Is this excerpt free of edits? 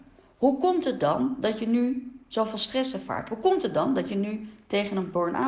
yes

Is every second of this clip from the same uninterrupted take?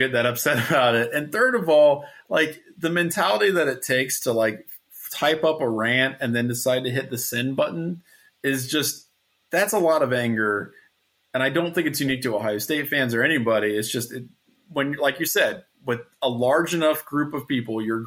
yes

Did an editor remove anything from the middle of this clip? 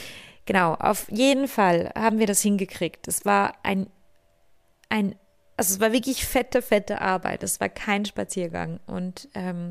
no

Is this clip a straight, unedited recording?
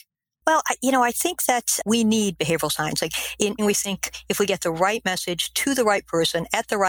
no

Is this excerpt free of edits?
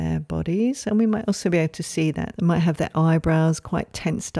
no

